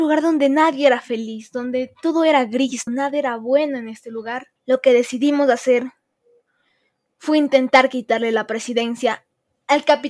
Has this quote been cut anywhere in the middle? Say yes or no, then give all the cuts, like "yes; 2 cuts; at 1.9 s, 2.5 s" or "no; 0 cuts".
yes; 2 cuts; at 2.9 s, 4.6 s